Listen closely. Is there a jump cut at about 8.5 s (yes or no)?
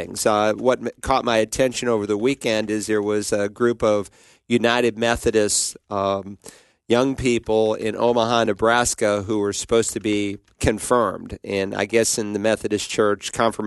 no